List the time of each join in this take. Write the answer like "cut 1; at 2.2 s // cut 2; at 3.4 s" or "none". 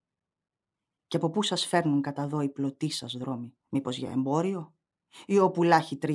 cut 1; at 3.6 s